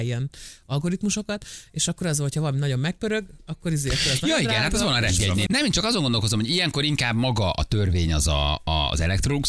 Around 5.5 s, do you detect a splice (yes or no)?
yes